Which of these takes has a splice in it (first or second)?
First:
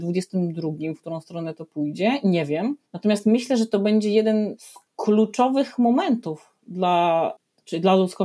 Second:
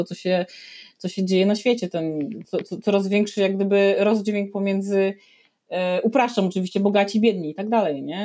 first